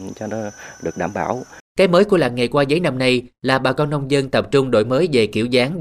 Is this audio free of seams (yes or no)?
no